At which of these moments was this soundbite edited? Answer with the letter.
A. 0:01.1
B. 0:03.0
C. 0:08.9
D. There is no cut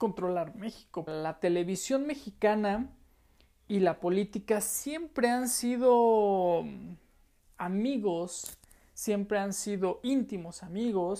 A